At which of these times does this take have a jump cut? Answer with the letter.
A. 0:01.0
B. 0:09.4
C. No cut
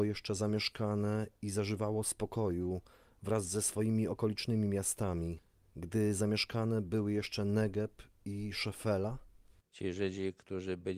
C